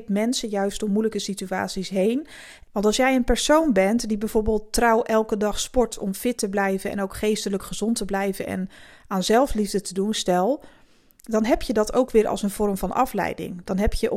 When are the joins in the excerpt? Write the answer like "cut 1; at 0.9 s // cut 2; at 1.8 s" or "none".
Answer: cut 1; at 2.6 s